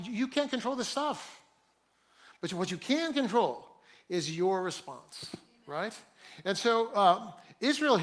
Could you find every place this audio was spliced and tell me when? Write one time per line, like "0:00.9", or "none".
none